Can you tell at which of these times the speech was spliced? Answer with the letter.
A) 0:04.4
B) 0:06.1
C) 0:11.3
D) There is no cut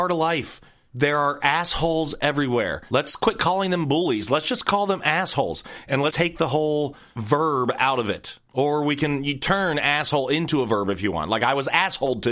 B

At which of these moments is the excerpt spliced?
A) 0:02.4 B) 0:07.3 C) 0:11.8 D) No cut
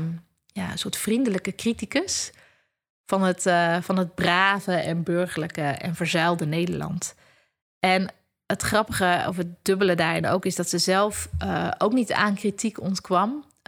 D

